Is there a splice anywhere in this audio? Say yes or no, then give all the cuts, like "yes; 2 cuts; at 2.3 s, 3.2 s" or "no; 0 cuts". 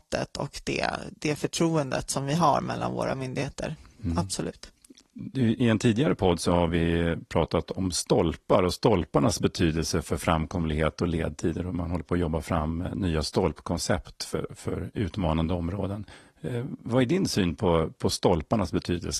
no; 0 cuts